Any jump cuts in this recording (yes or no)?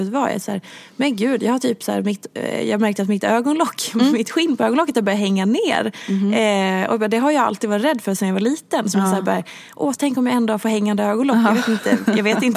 no